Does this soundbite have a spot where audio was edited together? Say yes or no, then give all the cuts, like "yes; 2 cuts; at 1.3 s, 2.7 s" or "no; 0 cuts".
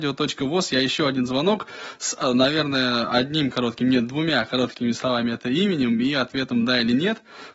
no; 0 cuts